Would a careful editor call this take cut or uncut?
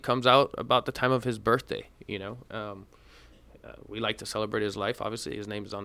uncut